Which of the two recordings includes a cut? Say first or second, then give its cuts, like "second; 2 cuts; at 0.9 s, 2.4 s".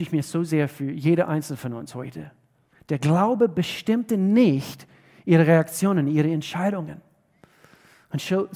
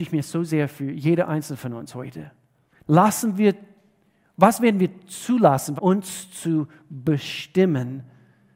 second; 2 cuts; at 2.8 s, 5.8 s